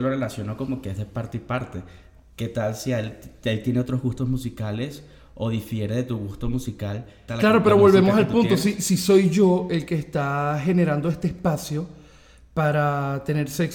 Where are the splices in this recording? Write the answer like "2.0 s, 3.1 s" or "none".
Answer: 7.3 s